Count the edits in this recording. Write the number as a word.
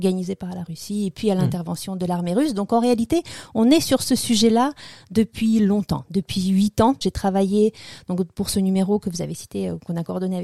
one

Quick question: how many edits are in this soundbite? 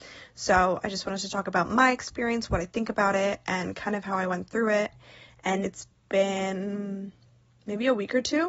one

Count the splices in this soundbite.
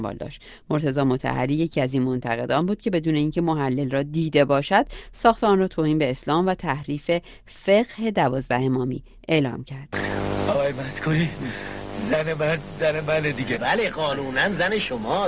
one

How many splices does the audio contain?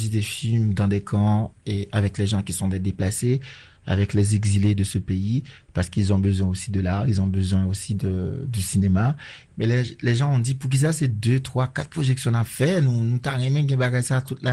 one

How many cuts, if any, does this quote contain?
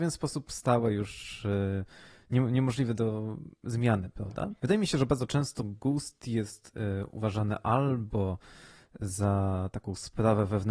one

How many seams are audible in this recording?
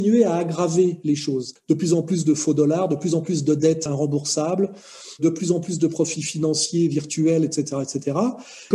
one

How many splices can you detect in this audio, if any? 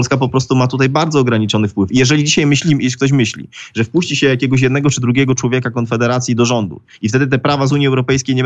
zero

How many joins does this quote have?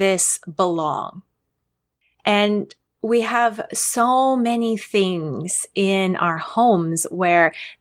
zero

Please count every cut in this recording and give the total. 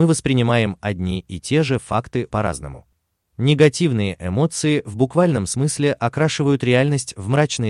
one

